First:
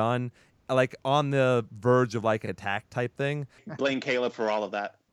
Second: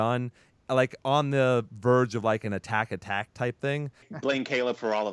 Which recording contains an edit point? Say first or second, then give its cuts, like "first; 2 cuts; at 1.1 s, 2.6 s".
first; 1 cut; at 2.4 s